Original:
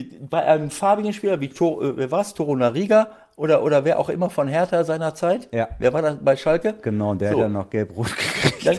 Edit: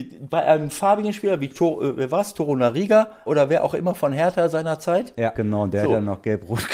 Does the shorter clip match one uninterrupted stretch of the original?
no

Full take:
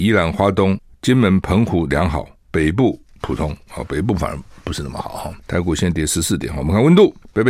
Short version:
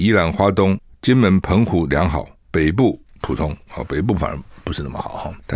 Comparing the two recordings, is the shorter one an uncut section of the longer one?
yes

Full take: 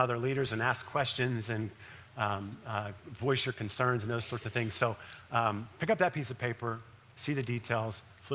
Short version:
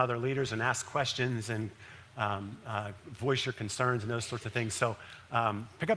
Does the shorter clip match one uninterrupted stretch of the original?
yes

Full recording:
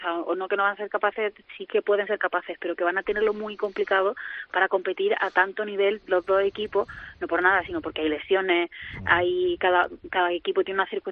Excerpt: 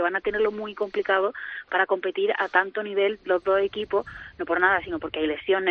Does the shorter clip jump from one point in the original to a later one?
no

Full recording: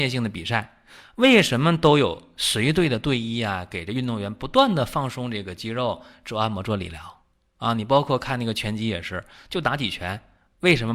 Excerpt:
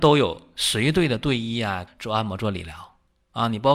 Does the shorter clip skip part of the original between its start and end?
yes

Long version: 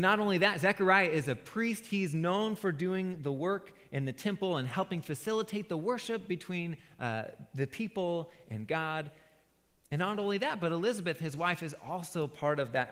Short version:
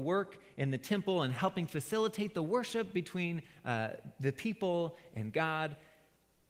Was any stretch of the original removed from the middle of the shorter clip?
no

